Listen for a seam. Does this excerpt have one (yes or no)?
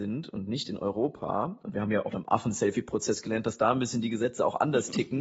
yes